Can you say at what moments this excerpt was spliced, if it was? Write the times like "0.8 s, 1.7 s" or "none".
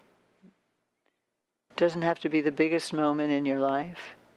1.7 s